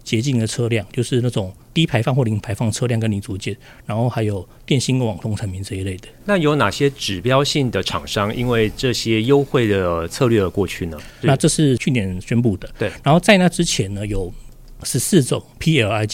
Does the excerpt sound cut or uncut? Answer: cut